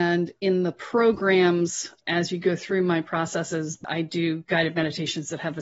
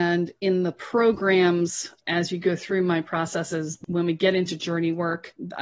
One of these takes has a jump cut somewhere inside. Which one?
first; 1 cut; at 3.8 s

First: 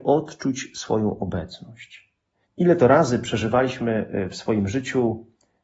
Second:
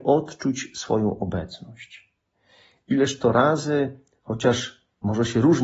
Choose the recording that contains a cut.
first; 1 cut; at 2.4 s

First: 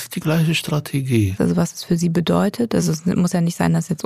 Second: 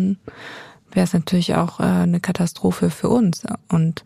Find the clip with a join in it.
first; 1 cut; at 1.4 s

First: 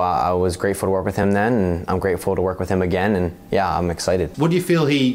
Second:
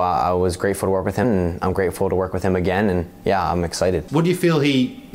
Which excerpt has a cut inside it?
second; 1 cut; at 1.2 s

